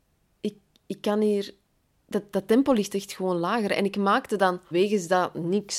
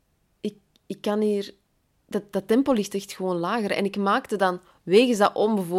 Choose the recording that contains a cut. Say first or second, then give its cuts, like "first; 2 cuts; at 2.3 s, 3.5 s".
first; 1 cut; at 4.7 s